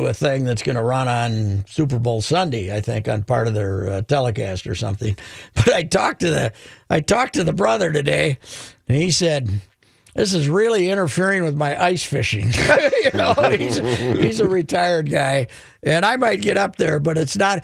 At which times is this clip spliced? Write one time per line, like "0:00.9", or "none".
none